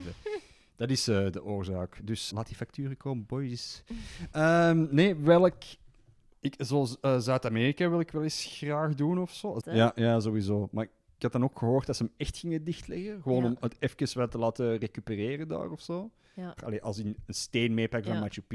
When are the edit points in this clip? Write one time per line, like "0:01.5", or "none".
0:02.3
0:09.6
0:16.6